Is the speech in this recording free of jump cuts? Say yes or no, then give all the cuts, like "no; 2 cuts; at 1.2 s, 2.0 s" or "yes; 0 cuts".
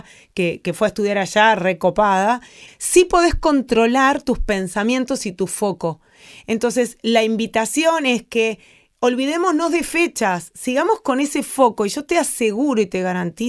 no; 1 cut; at 2.7 s